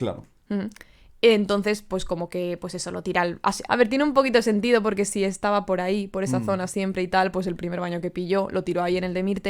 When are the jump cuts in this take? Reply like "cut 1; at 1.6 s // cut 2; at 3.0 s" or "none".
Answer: cut 1; at 3.7 s